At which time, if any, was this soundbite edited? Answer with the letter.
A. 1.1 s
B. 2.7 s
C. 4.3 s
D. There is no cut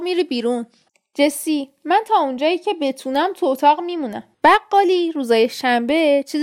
C